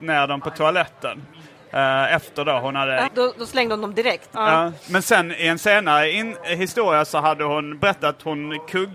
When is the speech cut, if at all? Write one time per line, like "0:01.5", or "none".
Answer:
0:03.1
0:04.3